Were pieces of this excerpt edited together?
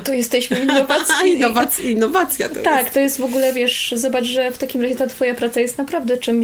no; 0 cuts

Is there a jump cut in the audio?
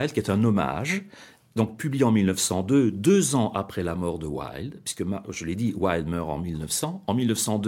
no; 0 cuts

